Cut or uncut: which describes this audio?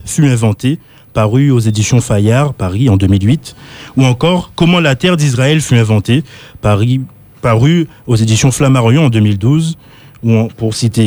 uncut